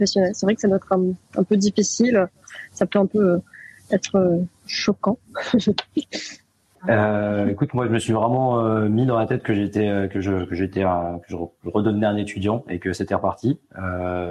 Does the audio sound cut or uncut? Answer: uncut